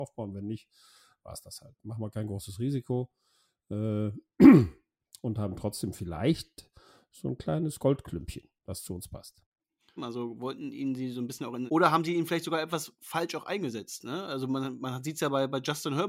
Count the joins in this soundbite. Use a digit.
2